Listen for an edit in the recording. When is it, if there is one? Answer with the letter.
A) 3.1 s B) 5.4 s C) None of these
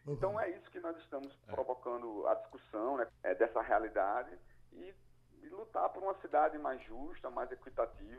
A